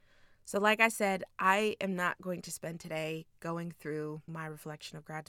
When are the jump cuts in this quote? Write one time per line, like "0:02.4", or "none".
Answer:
none